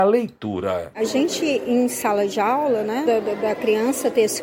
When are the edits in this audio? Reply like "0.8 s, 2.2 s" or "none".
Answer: 0.9 s, 3.1 s